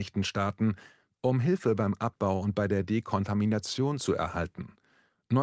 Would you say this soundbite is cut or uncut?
uncut